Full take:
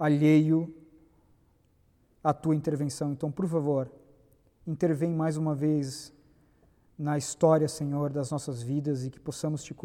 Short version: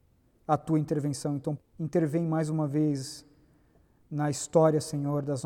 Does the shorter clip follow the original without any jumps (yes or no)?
no